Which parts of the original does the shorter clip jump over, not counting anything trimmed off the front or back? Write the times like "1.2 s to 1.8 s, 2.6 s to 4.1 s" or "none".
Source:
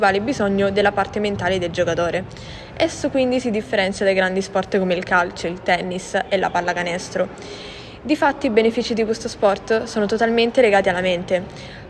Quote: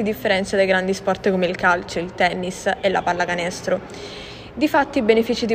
none